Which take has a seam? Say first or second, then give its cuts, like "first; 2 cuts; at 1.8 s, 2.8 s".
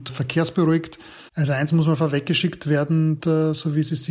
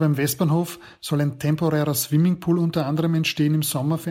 first; 2 cuts; at 1.3 s, 3.2 s